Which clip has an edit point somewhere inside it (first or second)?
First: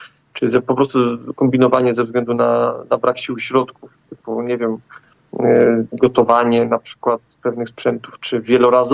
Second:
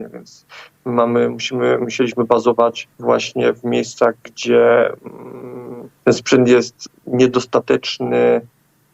second